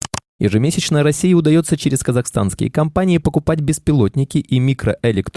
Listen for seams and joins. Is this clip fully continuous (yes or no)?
yes